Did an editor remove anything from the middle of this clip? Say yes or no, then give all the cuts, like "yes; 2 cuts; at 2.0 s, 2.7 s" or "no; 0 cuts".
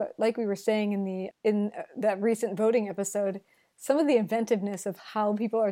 yes; 1 cut; at 1.3 s